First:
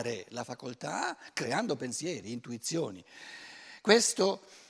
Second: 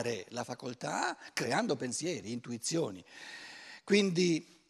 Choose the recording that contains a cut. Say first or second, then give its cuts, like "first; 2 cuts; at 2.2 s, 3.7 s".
first; 1 cut; at 3.8 s